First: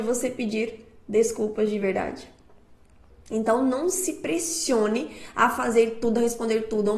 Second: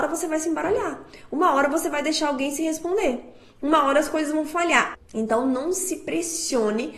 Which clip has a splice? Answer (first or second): second